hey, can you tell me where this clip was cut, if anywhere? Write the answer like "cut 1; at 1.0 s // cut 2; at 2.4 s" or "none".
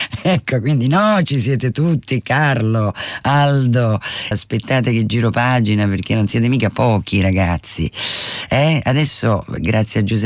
cut 1; at 2.2 s // cut 2; at 4.3 s